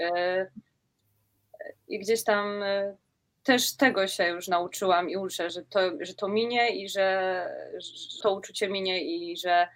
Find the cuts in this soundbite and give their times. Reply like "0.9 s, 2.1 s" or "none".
5.5 s, 8.2 s